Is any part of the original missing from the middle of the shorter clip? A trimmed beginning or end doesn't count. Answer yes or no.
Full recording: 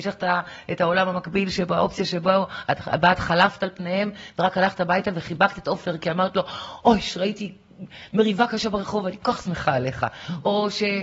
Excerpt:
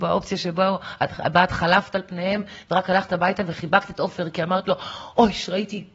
no